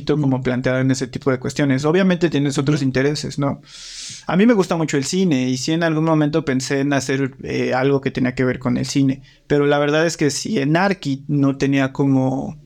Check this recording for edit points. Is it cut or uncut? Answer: uncut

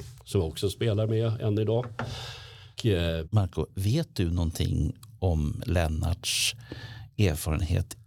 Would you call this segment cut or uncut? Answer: cut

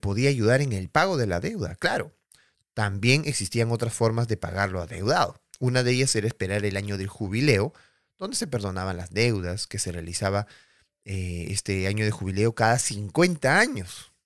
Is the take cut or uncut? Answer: uncut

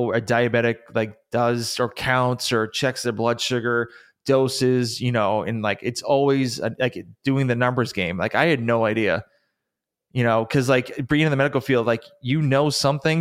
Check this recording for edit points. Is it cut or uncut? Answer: uncut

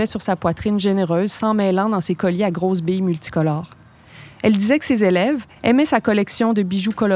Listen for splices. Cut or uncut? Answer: cut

